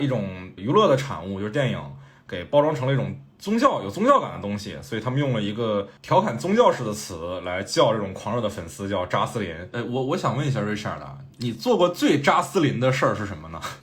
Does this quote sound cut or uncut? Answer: uncut